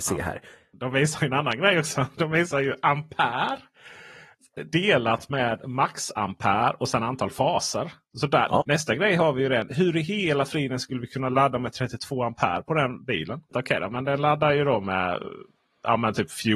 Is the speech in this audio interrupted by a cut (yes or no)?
yes